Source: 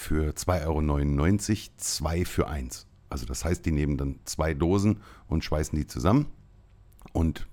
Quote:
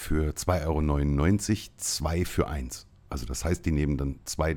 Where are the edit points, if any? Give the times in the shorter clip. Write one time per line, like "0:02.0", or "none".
none

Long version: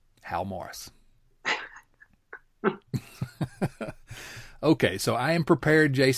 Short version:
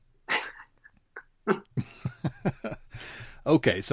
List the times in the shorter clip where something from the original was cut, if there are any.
none

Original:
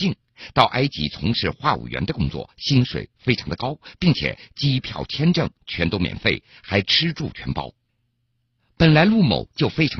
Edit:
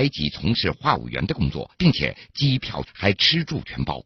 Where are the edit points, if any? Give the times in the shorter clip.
0:01.7
0:02.8

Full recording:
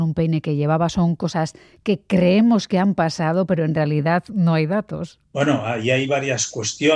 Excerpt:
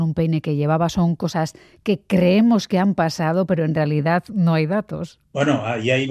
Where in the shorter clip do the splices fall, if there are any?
none

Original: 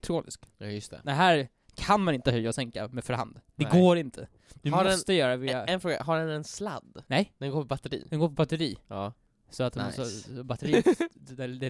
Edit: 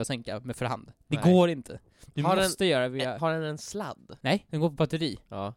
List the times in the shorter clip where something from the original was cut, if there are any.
0:03.2
0:04.5

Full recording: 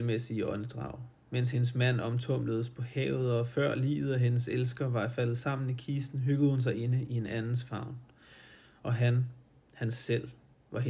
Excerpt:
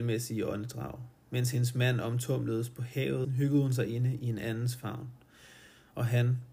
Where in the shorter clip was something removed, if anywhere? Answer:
0:03.2

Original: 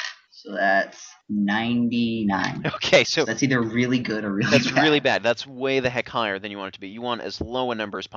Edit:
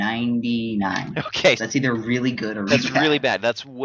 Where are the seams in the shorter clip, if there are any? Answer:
0:01.6
0:02.7

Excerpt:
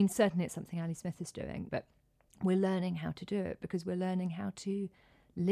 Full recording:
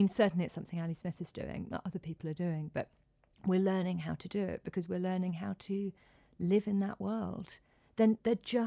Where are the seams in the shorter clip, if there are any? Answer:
0:01.7

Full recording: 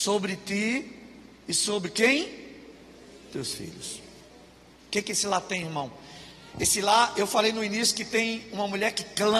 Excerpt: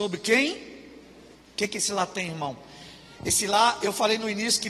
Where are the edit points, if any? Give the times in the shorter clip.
0:01.3

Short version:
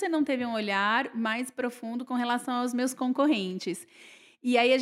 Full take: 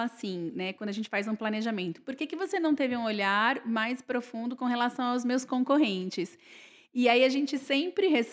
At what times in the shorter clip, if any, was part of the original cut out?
none

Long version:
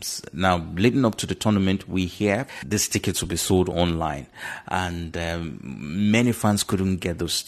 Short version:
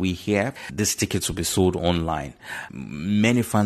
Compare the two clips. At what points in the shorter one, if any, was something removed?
0:02.7

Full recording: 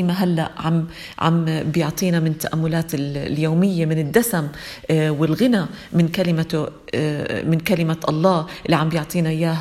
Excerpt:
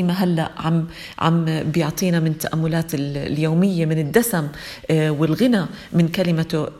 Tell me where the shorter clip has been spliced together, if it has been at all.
none

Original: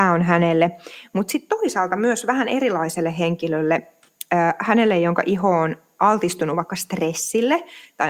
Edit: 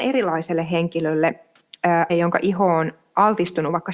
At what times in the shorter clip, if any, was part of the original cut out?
0:02.1

